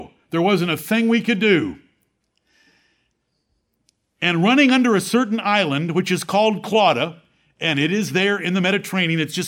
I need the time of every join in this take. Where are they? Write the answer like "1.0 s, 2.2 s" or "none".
none

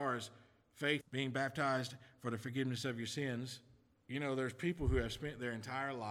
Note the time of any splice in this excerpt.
1.0 s, 3.9 s

